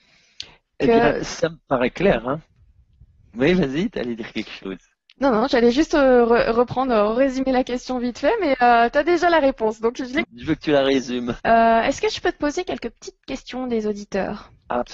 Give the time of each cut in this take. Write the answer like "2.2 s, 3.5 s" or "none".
10.2 s, 11.4 s